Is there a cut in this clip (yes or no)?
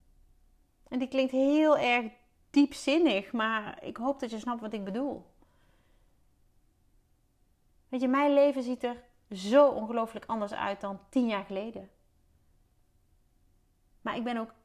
no